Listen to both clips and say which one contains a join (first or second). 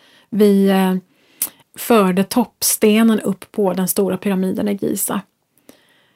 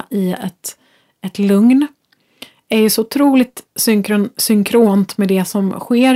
first